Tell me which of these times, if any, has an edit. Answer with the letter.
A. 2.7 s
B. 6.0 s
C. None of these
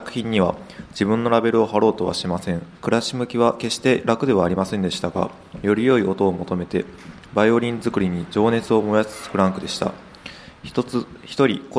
A